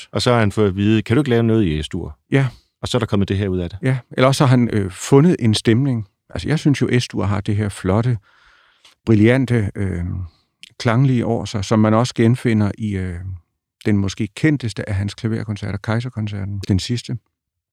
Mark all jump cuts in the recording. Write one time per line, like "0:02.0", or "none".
0:16.6